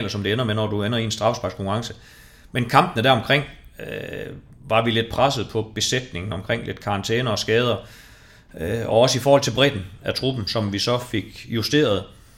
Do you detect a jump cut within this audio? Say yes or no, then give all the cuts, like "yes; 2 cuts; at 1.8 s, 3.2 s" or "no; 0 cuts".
no; 0 cuts